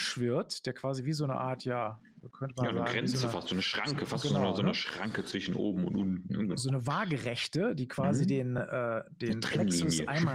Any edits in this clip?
no; 0 cuts

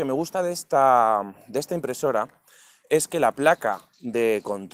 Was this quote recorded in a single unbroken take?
yes; 0 cuts

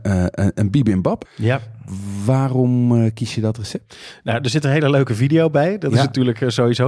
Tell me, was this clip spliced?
yes; 1 cut; at 1.3 s

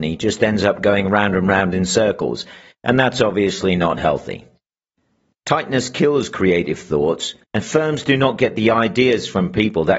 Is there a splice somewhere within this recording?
yes; 2 cuts; at 5.3 s, 7.4 s

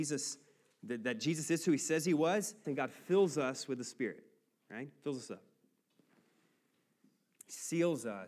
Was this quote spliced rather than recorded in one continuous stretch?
yes; 1 cut; at 2.6 s

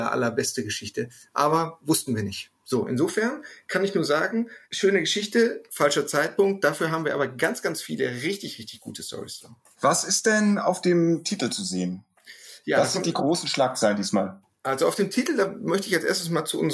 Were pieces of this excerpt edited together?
no; 0 cuts

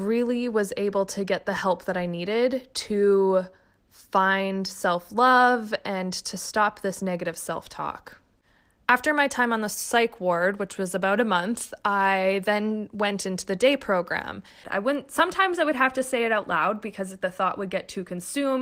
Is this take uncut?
no; 1 cut; at 14.6 s

